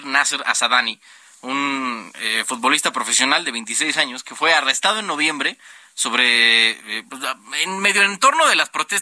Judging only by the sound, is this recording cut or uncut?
uncut